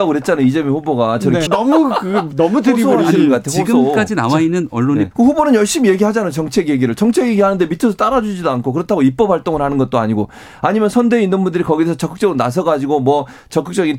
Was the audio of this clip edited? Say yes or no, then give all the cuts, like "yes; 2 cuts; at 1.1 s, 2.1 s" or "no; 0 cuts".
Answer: yes; 2 cuts; at 1.5 s, 5.1 s